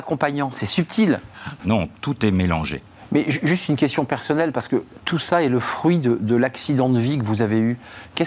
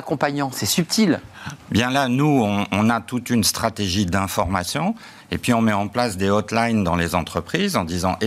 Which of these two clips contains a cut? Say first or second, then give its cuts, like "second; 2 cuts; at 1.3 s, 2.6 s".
first; 1 cut; at 1.6 s